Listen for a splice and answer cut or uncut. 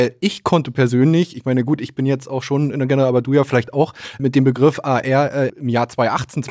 cut